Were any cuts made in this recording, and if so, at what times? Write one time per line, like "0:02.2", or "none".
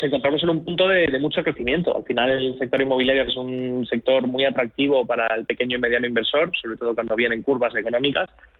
0:03.3